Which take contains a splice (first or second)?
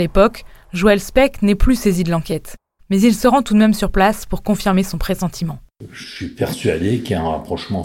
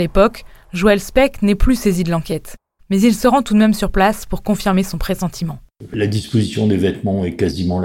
second